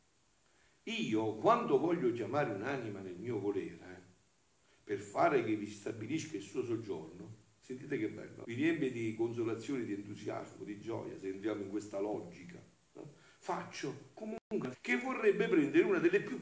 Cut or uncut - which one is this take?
cut